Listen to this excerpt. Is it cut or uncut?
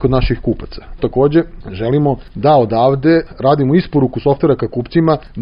cut